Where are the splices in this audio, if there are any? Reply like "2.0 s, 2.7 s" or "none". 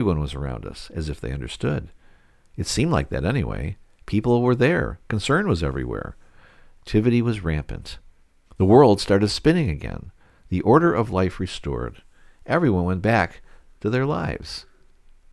8.5 s